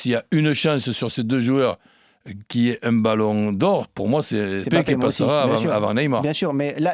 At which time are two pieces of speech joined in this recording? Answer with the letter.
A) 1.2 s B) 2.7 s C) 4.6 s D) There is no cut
C